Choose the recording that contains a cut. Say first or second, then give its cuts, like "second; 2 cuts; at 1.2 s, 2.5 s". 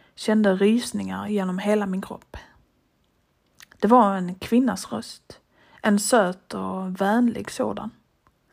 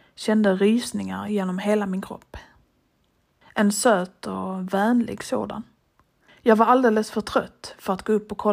second; 2 cuts; at 3.4 s, 6.3 s